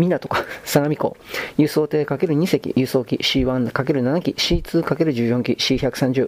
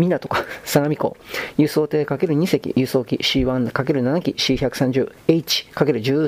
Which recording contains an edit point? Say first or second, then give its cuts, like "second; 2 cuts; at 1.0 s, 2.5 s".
second; 1 cut; at 4.3 s